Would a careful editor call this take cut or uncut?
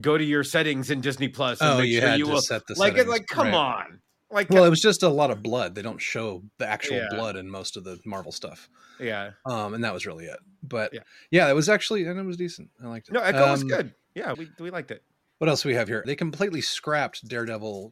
cut